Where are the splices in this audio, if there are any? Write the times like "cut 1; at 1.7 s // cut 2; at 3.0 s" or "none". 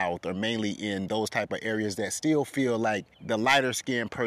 cut 1; at 3.1 s